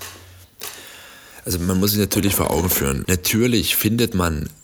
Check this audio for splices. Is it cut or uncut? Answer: cut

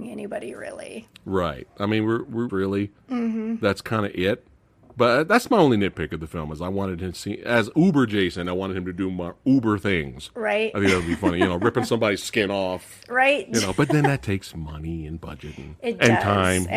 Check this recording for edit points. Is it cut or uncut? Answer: cut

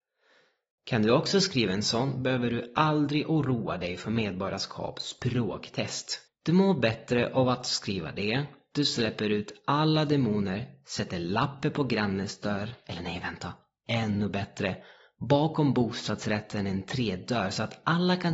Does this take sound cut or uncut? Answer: cut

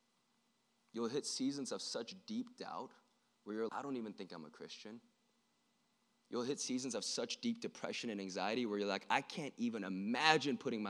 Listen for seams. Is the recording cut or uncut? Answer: cut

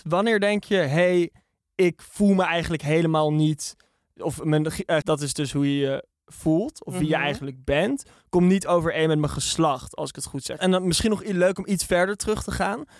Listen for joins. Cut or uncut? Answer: cut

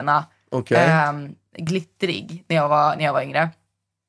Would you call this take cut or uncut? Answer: uncut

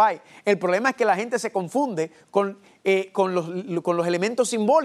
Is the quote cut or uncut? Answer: uncut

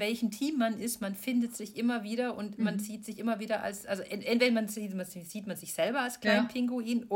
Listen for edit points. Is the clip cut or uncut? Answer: uncut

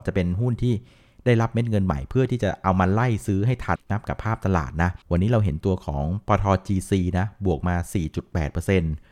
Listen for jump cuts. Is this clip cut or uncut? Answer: cut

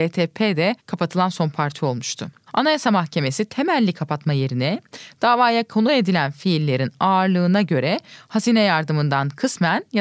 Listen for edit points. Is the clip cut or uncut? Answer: cut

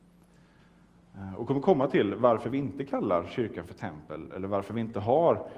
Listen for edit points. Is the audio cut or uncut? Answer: uncut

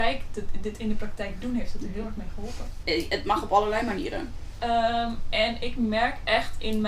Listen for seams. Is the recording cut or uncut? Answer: cut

